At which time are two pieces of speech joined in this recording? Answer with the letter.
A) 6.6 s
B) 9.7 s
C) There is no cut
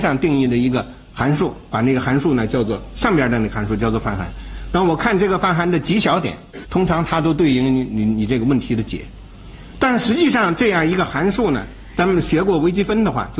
A